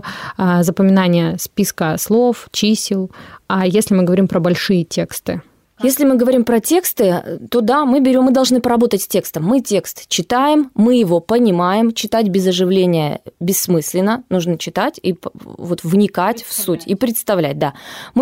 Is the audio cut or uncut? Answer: uncut